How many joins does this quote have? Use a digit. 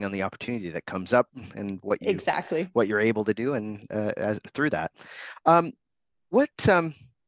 0